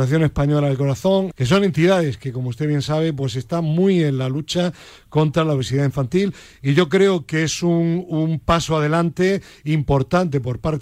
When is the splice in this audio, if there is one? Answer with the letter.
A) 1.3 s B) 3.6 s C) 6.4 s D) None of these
A